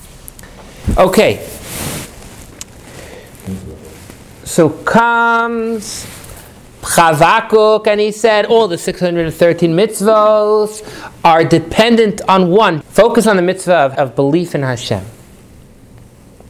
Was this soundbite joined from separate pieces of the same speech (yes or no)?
yes